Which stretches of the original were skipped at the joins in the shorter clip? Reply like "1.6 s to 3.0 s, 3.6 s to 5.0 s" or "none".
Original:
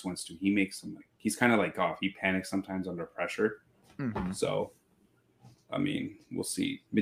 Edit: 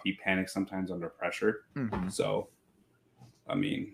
3.7 s to 3.9 s

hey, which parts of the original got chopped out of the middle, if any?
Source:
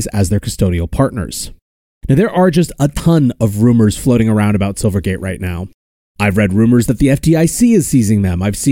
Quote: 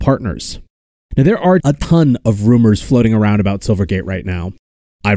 2.5 s to 2.8 s

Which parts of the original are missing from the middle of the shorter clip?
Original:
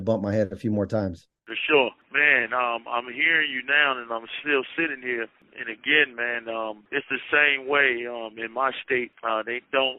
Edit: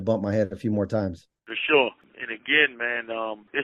2.0 s to 5.4 s

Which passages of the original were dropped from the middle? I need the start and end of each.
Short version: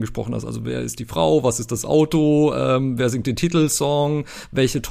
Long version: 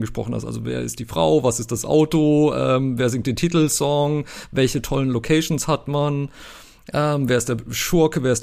none

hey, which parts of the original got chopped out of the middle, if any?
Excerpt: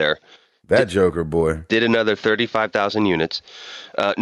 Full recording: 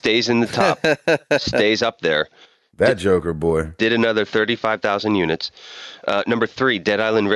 none

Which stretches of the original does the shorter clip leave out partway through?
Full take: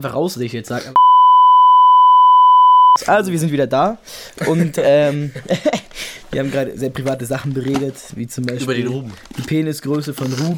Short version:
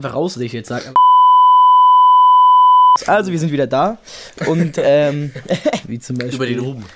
5.8 s to 8.1 s

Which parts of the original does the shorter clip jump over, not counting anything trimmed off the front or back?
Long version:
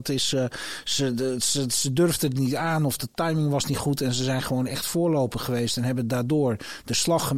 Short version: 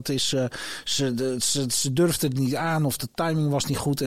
none

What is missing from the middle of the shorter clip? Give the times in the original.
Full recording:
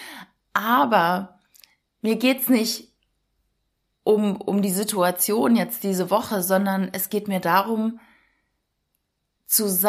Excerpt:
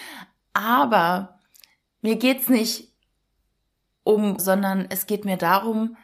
4.4 s to 6.4 s

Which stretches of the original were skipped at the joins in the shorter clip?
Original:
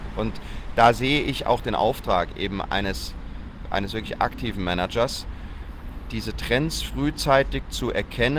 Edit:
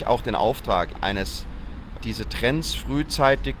2.3 s to 2.6 s, 3.7 s to 6.1 s

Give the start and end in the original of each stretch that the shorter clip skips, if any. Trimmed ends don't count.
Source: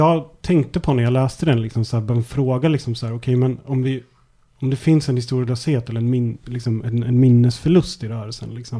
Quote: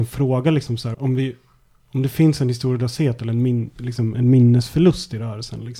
3.1 s to 3.6 s, 6.8 s to 7.0 s

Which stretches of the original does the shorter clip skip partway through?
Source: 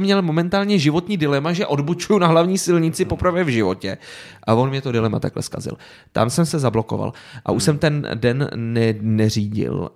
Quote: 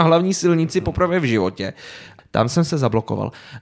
4.4 s to 6.0 s

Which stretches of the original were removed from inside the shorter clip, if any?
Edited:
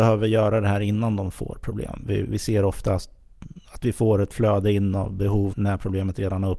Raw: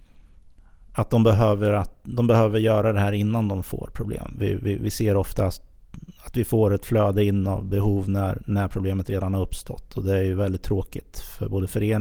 4.6 s to 4.8 s, 8.0 s to 8.4 s

